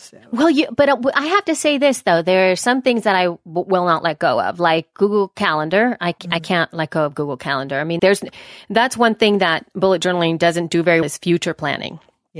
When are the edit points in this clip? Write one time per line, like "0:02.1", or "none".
0:08.0
0:11.0